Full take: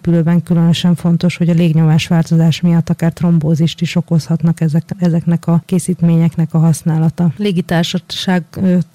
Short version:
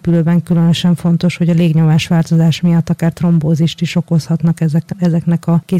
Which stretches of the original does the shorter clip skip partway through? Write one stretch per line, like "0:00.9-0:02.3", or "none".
none